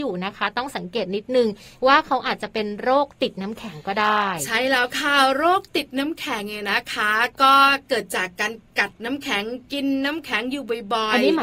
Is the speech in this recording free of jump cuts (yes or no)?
yes